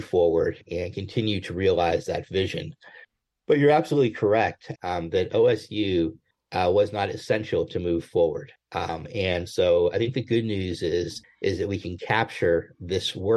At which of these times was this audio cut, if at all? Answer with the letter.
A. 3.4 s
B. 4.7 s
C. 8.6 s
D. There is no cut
B